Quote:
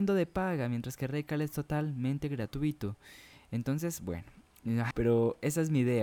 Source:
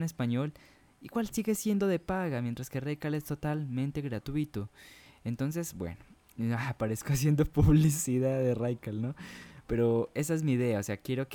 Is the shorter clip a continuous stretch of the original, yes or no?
no